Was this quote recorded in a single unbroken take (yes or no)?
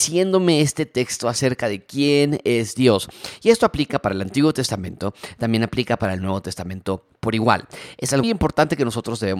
no